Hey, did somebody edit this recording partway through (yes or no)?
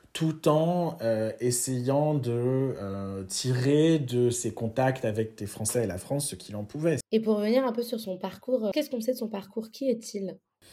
yes